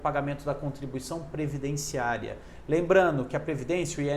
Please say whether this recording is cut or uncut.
uncut